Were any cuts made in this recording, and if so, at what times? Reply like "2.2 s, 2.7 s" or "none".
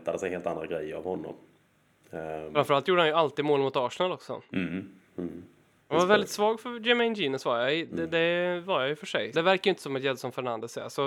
5.8 s, 9.3 s